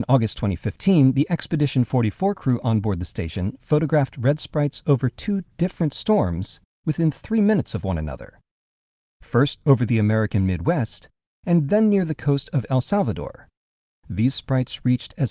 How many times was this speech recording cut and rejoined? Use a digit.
0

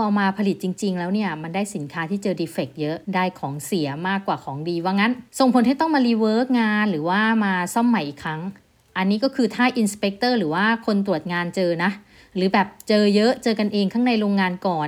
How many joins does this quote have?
2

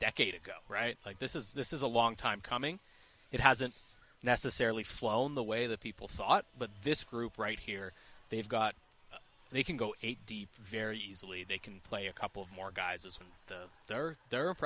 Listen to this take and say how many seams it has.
1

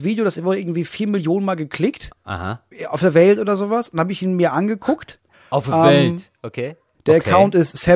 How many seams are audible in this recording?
1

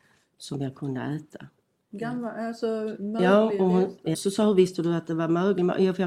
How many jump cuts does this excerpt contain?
2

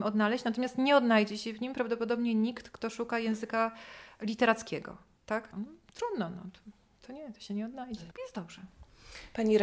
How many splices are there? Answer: 2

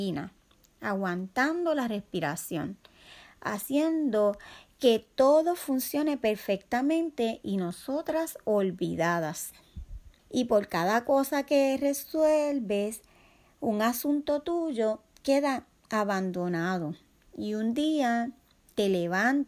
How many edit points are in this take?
1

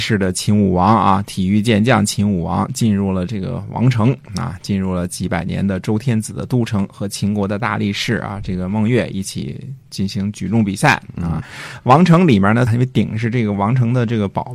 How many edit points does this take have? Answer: 3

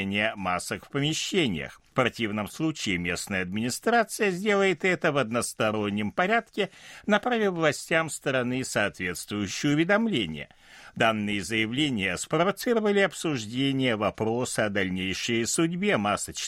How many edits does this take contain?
1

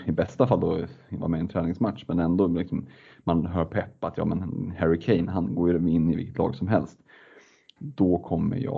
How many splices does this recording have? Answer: 0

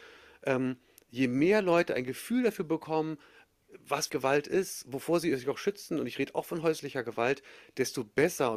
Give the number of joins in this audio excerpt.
1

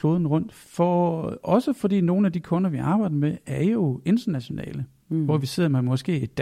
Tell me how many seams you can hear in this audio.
0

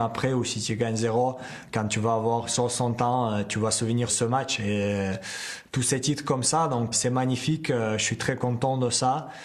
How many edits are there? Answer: 2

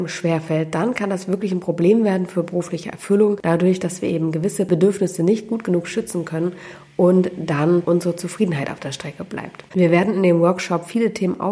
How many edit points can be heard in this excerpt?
1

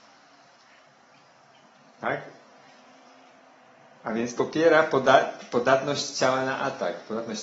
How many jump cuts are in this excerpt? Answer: 0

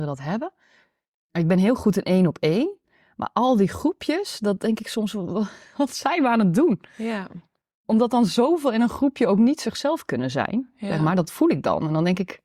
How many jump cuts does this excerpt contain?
0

